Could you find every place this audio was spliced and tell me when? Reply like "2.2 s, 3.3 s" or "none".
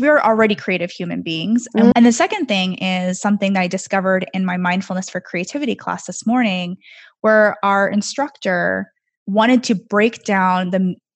1.9 s